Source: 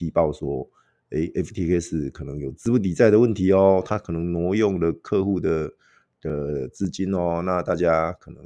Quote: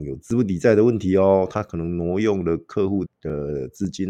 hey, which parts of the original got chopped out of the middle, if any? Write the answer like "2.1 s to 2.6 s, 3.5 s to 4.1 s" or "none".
5.4 s to 6.0 s